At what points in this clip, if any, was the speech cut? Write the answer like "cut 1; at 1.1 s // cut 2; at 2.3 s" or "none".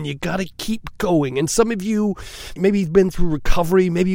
cut 1; at 2.6 s